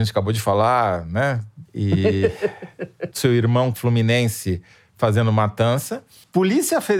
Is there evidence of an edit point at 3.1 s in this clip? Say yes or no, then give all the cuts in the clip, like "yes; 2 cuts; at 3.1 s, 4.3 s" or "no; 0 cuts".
yes; 2 cuts; at 1.7 s, 3.1 s